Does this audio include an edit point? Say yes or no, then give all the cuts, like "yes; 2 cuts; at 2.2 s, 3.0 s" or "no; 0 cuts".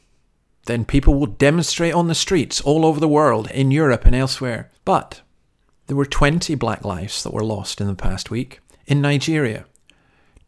yes; 2 cuts; at 3.5 s, 4.8 s